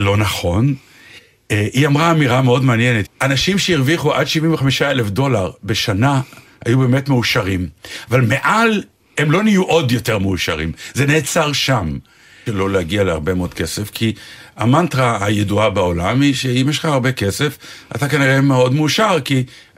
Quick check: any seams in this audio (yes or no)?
yes